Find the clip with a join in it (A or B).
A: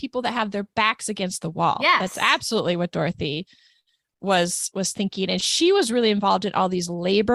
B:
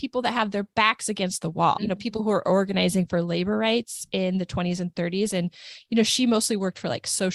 B